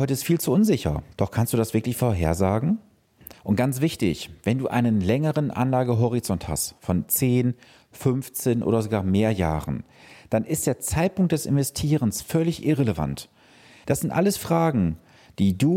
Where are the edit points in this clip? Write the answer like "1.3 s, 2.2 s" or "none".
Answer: 1.1 s, 3.3 s, 13.8 s